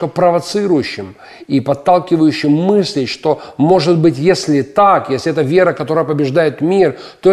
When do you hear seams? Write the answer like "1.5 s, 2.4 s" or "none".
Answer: none

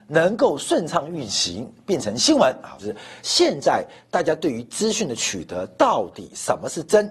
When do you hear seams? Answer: 2.8 s

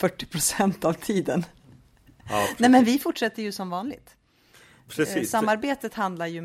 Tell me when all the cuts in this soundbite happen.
none

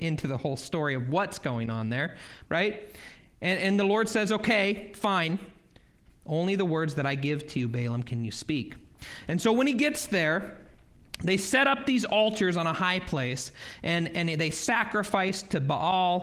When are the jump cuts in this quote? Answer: 2.4 s, 6.0 s

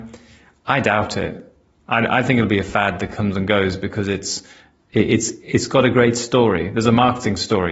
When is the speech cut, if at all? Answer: none

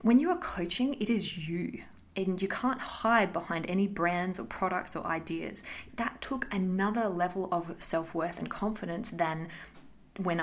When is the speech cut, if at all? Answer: 5.9 s

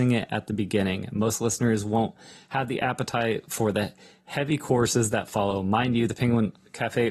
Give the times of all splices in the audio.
none

